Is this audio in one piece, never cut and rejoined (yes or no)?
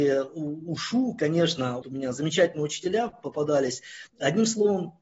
no